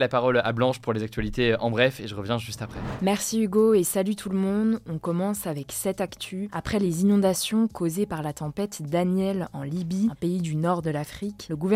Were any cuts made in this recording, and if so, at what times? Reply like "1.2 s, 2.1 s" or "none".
none